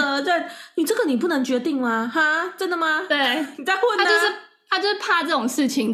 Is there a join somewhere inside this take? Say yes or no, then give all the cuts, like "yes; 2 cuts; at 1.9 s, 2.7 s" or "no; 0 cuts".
no; 0 cuts